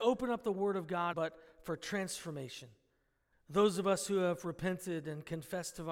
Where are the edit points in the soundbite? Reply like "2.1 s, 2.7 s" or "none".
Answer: 1.1 s, 3.3 s